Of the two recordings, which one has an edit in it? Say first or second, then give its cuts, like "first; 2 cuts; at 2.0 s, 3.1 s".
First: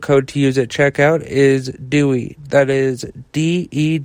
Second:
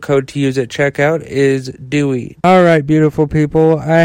second; 1 cut; at 2.4 s